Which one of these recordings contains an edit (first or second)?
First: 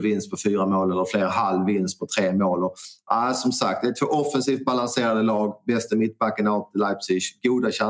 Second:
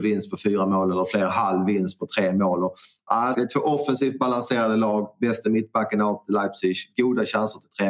second